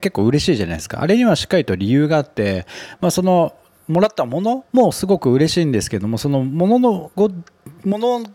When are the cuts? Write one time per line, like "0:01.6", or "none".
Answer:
0:04.7